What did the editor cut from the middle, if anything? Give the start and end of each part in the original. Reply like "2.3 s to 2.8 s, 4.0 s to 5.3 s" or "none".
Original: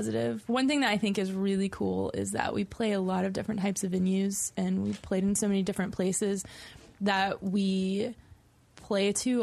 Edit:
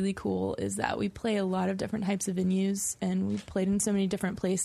none